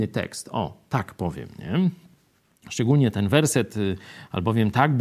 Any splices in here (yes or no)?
no